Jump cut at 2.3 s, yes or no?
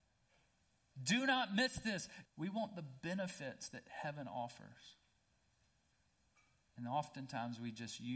yes